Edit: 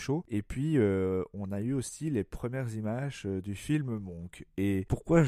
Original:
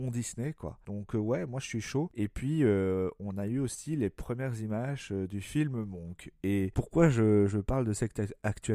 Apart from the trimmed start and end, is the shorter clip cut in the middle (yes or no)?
no